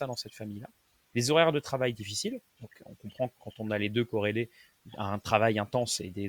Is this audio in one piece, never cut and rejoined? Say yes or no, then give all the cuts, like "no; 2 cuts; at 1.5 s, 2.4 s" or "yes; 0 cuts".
no; 1 cut; at 2.5 s